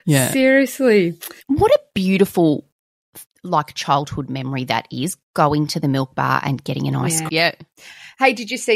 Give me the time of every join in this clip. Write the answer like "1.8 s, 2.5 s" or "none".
1.4 s, 7.3 s